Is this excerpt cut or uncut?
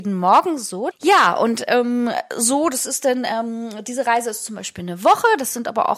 cut